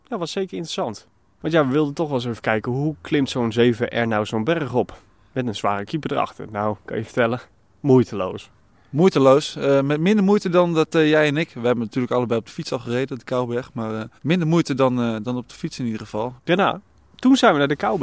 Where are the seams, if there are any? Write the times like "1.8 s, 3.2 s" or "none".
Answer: 1.4 s, 14.2 s, 16.4 s